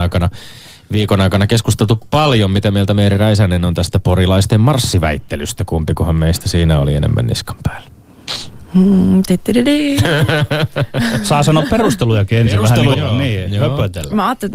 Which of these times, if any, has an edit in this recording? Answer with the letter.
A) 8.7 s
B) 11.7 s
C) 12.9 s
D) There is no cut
C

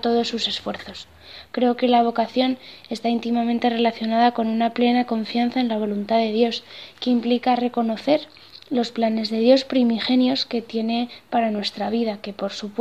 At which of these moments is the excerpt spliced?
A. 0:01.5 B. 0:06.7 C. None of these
A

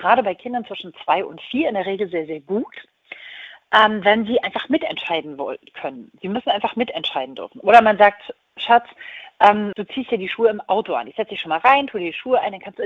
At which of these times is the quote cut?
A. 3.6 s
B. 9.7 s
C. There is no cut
B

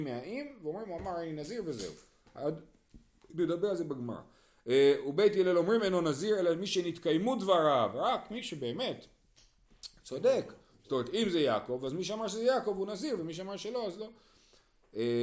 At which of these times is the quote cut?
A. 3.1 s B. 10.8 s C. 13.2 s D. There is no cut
D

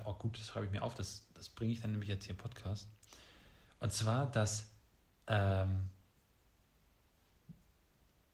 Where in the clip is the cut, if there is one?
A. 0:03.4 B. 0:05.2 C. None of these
C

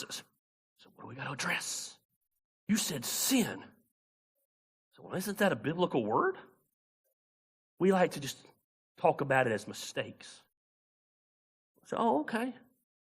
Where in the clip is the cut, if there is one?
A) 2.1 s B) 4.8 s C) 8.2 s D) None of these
D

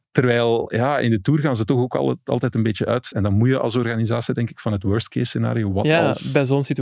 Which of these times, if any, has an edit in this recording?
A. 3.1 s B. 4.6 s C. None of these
C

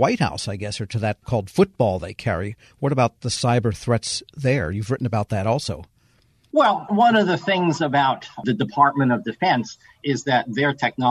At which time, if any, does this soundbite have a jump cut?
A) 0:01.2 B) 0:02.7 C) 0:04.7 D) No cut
A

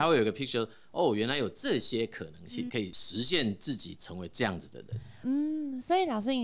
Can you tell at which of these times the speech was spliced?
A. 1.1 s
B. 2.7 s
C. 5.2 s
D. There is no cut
B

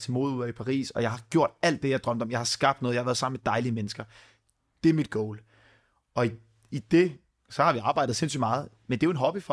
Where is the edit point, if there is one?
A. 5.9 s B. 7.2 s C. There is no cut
C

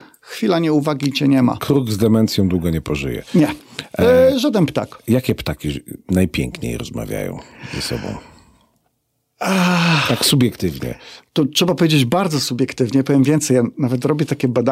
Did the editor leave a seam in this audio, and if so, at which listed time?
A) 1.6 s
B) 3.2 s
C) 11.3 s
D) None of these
D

